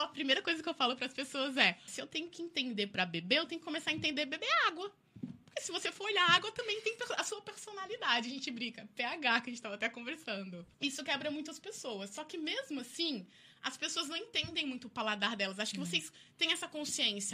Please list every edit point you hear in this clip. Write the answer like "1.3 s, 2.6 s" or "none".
1.9 s, 10.7 s